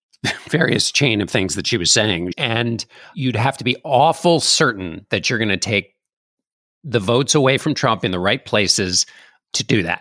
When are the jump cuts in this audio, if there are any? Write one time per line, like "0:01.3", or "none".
0:02.3